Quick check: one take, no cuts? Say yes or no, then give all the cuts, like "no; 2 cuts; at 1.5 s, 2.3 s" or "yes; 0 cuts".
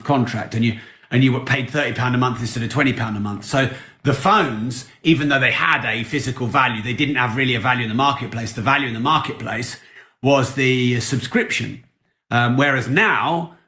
yes; 0 cuts